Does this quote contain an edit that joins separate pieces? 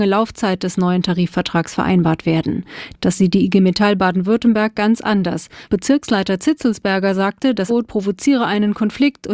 yes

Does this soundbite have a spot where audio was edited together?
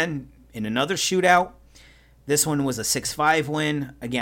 no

